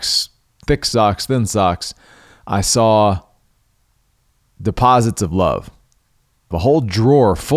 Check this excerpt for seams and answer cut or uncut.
cut